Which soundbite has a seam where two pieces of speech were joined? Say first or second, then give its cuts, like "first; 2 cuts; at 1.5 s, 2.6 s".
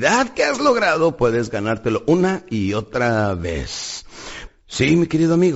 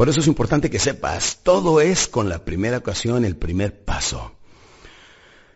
first; 1 cut; at 4.5 s